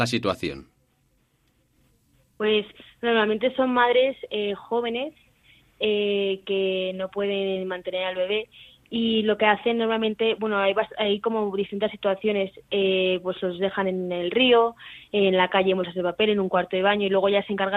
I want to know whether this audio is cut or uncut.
uncut